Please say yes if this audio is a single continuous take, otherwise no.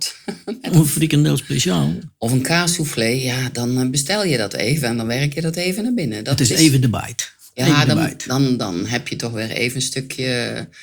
yes